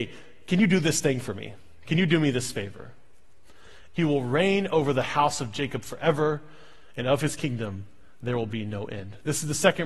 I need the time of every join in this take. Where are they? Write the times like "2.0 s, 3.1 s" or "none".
3.9 s